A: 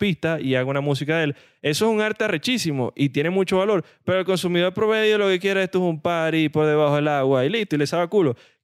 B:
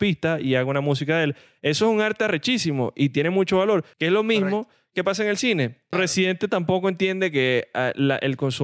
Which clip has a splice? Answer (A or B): B